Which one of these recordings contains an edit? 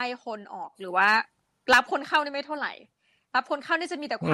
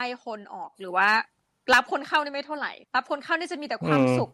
second; 1 cut; at 2.8 s

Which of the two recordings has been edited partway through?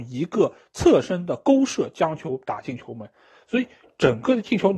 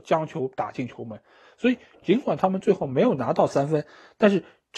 second; 1 cut; at 2.0 s

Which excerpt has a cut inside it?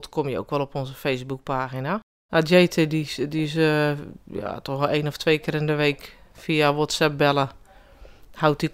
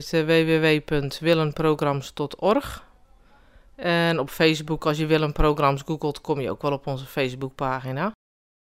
first; 1 cut; at 2.3 s

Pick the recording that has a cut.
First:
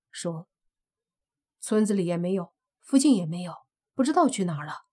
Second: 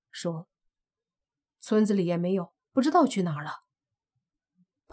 second; 1 cut; at 2.6 s

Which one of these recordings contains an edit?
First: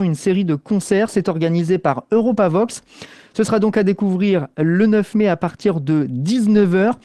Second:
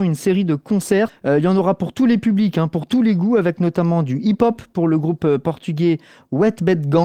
second; 1 cut; at 1.1 s

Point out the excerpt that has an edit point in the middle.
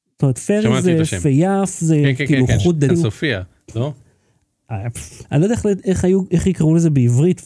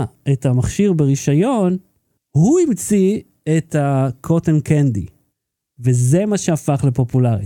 first; 3 cuts; at 1.8 s, 2.9 s, 5.2 s

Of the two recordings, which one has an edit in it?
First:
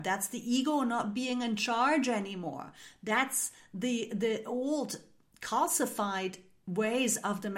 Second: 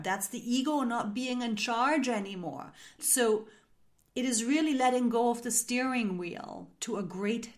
second; 1 cut; at 3.0 s

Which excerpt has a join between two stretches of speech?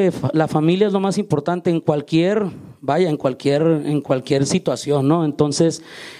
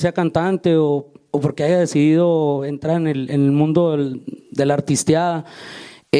second; 1 cut; at 3.3 s

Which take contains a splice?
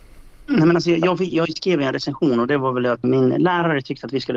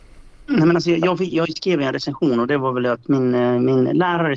first; 1 cut; at 3.0 s

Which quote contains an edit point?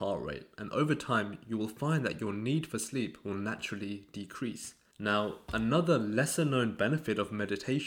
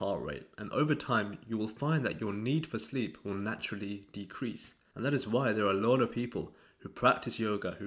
first; 1 cut; at 4.9 s

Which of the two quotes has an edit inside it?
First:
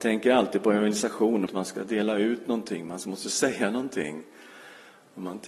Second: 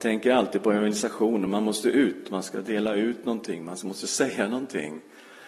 first; 1 cut; at 1.5 s

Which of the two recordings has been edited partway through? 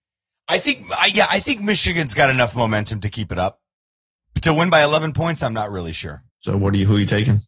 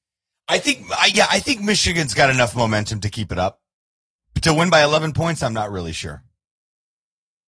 first; 1 cut; at 6.3 s

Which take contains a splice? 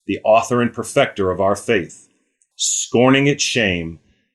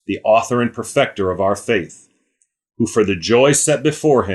first; 1 cut; at 2.5 s

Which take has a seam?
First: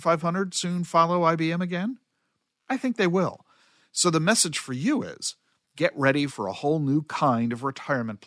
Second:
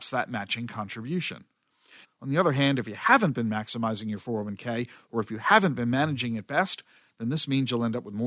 second; 1 cut; at 2.0 s

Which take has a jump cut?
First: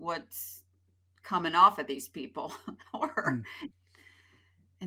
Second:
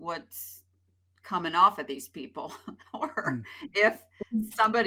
first; 1 cut; at 3.7 s

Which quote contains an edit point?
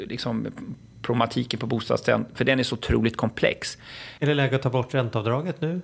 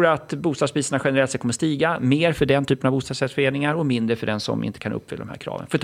first; 2 cuts; at 2.3 s, 4.2 s

